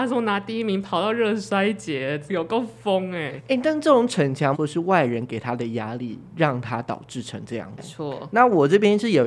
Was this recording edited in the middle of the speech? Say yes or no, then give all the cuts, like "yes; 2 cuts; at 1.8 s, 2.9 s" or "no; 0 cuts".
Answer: yes; 3 cuts; at 2.3 s, 4.5 s, 7.8 s